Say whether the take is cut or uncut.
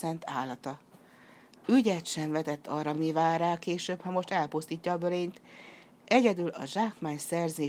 uncut